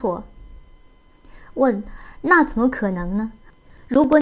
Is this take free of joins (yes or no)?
yes